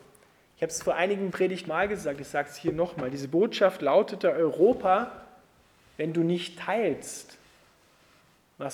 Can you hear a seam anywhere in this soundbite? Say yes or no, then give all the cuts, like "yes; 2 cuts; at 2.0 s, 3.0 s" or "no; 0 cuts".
yes; 1 cut; at 1.7 s